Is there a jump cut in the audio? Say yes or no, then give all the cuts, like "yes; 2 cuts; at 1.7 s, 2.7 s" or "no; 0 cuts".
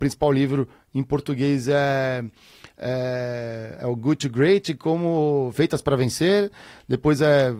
no; 0 cuts